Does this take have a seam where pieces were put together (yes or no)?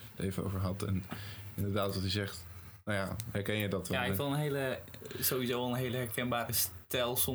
no